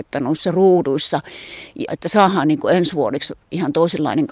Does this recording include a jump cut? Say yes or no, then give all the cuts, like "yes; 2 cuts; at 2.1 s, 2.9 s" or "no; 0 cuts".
yes; 1 cut; at 1.9 s